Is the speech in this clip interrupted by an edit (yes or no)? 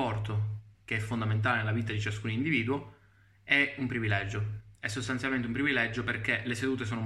no